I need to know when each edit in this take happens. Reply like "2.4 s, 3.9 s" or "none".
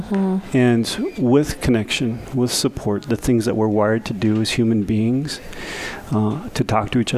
none